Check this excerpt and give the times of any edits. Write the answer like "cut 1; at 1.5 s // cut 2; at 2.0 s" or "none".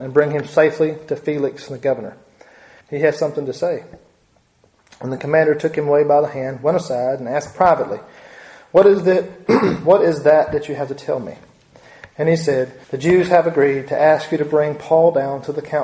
cut 1; at 2.8 s // cut 2; at 12.8 s